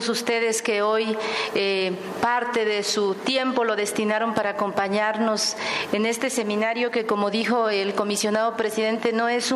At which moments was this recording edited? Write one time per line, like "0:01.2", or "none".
none